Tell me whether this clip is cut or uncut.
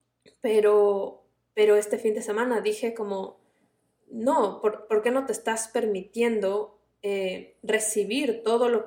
uncut